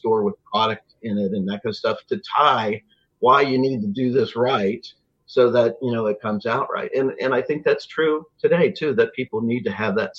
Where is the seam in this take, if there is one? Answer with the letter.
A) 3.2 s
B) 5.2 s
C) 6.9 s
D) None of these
D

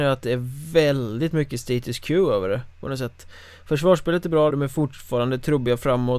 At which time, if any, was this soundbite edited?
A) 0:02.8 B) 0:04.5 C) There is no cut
B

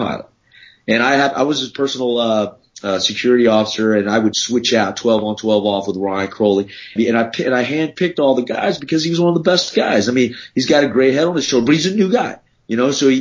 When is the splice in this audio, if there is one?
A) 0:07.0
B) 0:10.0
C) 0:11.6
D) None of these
A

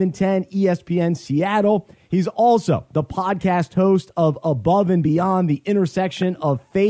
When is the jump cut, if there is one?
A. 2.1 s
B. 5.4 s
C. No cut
A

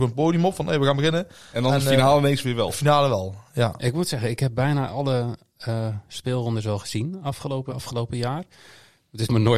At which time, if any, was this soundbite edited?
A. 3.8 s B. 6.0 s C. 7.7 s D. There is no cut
C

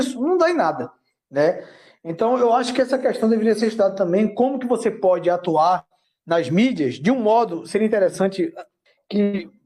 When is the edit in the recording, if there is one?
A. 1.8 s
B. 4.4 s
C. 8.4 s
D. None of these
D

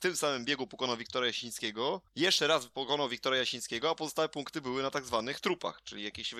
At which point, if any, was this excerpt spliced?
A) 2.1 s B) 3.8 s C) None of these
A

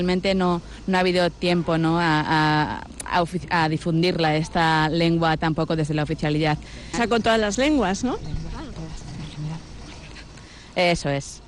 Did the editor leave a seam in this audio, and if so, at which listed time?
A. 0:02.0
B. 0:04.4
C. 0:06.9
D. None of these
C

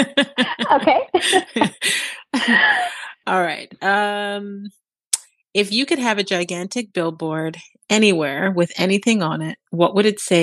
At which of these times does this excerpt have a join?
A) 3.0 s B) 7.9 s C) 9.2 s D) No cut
D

